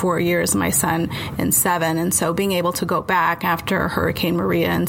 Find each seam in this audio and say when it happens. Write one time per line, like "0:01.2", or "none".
none